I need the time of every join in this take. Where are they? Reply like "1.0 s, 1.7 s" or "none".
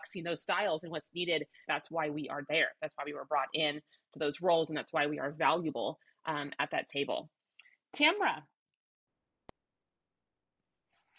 1.6 s